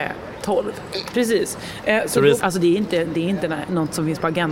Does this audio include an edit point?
yes; 2 cuts; at 1.1 s, 2.4 s

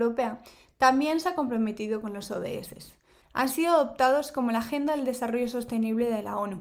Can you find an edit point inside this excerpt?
yes; 1 cut; at 3.2 s

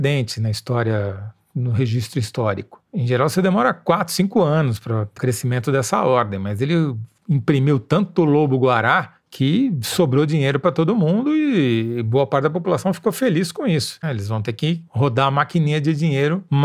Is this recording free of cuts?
no; 2 cuts; at 5.2 s, 14.0 s

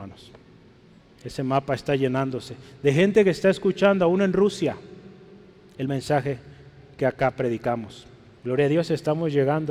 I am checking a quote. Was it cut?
yes; 1 cut; at 8.4 s

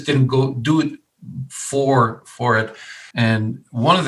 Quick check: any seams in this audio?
yes; 1 cut; at 3.1 s

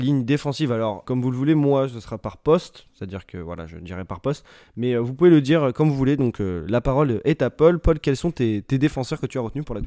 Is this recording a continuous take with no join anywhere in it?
no; 1 cut; at 1.0 s

